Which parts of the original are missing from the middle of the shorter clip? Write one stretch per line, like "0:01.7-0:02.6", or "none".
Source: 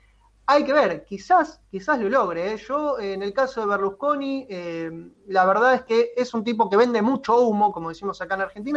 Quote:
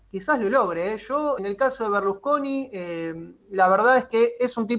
0:03.0-0:03.1